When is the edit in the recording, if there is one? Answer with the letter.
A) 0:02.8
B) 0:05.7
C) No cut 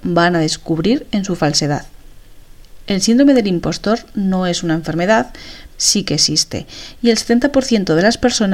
B